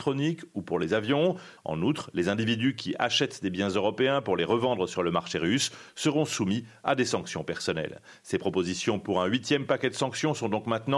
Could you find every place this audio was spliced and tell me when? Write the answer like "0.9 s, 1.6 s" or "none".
1.6 s